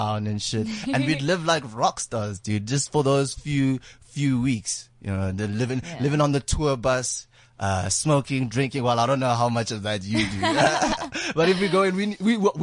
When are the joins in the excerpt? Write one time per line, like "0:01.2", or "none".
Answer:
none